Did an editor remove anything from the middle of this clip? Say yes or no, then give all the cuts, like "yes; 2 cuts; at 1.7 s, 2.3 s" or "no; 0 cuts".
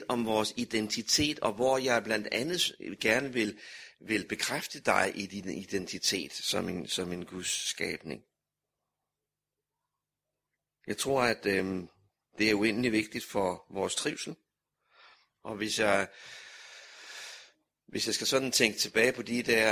no; 0 cuts